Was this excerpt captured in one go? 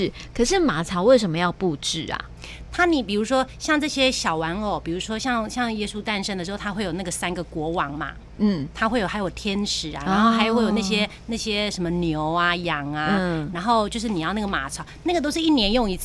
yes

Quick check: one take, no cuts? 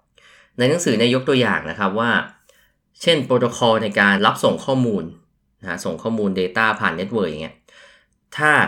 no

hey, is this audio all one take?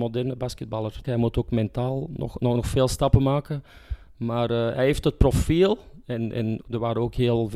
no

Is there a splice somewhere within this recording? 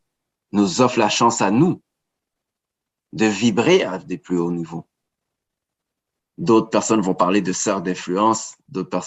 yes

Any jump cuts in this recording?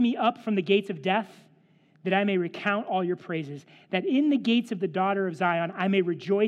no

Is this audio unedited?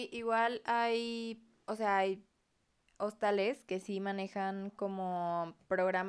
yes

